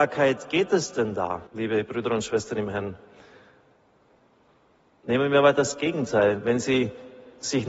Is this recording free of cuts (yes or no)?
no